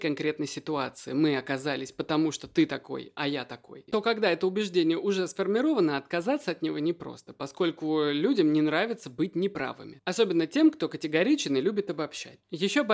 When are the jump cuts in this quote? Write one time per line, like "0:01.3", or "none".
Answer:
0:03.9